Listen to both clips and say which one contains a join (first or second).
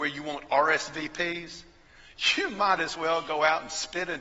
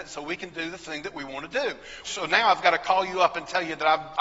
second